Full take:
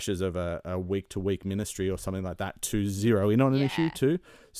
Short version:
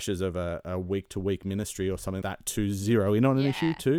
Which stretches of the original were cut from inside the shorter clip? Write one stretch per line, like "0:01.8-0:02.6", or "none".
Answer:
0:02.2-0:02.4

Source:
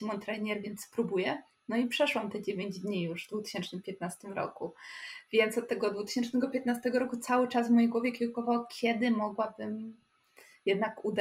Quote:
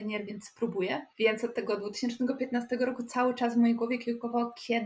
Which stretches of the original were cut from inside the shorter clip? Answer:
0:01.5-0:05.3

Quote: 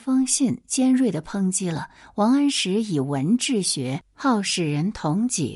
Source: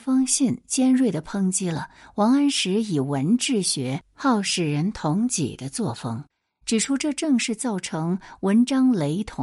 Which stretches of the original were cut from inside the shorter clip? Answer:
none

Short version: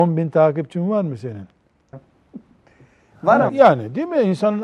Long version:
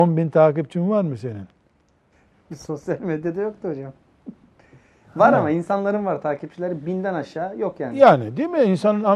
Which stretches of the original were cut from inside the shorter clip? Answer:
0:01.9-0:03.9
0:05.4-0:07.9

